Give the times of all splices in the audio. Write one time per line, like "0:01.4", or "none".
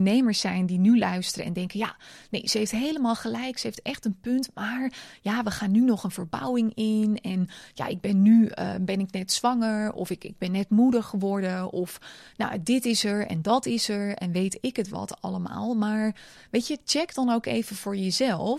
0:08.7